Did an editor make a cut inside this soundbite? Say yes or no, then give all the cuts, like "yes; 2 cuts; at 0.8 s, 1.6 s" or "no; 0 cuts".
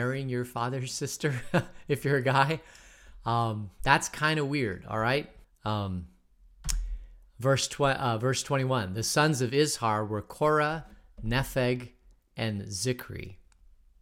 yes; 1 cut; at 5.4 s